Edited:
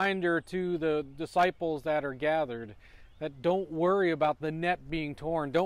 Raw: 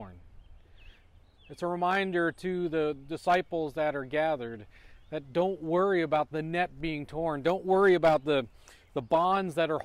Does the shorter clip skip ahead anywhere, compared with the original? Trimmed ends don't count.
no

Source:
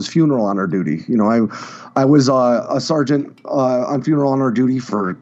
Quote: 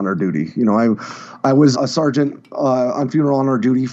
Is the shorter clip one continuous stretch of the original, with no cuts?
no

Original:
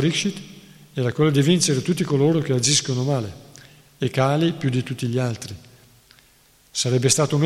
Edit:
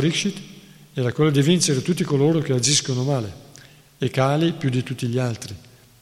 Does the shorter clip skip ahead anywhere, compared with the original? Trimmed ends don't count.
no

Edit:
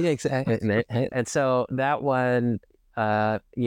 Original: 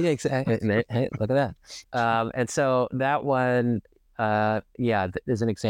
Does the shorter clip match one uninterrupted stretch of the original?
no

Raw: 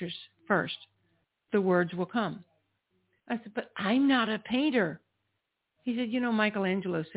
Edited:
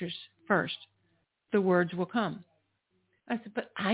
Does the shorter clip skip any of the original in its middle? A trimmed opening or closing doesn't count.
no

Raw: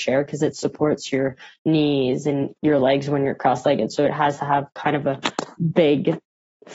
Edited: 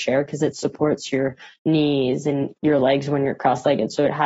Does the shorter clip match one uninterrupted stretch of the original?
yes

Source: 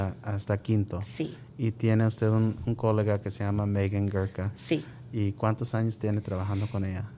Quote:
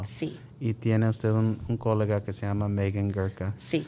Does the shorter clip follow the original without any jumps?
yes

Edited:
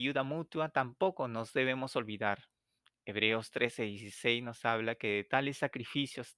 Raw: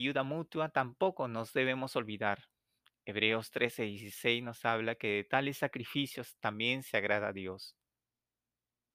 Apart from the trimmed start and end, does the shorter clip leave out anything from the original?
no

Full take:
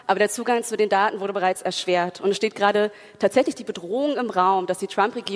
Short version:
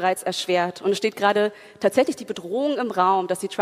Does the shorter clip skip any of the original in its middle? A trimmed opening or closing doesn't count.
no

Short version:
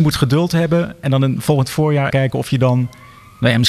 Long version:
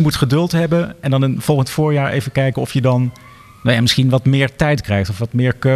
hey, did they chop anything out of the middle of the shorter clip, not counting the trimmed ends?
yes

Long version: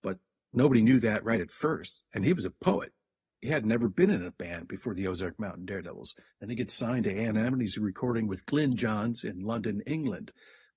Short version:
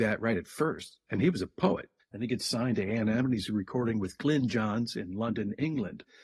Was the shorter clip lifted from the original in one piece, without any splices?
no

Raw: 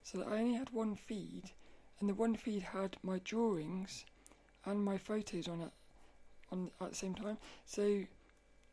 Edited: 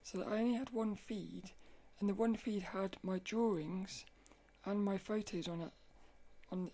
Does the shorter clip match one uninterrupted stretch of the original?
yes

